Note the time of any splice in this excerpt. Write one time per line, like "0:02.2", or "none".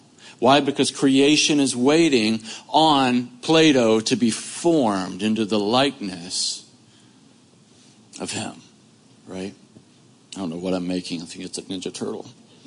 none